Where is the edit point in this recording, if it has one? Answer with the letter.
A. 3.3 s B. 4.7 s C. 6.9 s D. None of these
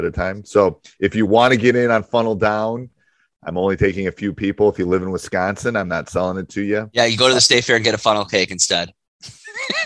A